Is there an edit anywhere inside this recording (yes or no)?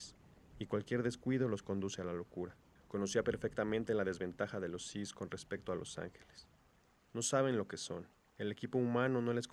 no